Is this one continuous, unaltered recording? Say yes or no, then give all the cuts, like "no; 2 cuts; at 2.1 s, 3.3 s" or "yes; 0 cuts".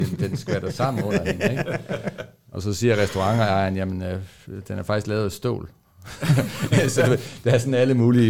yes; 0 cuts